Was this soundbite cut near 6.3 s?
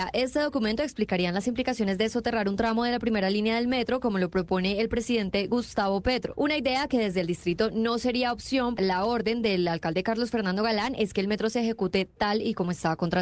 no; 1 cut; at 8.8 s

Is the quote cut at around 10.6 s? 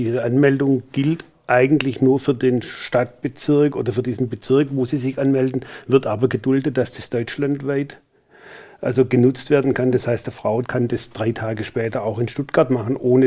yes; 1 cut; at 10.6 s

